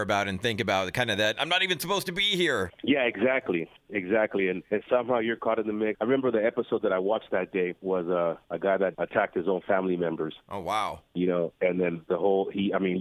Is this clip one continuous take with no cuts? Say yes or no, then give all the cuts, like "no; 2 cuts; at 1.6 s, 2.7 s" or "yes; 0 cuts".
yes; 0 cuts